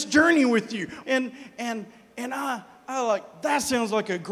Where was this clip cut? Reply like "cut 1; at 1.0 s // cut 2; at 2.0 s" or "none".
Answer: cut 1; at 1.0 s